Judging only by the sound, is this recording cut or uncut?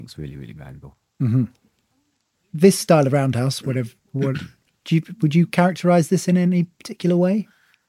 cut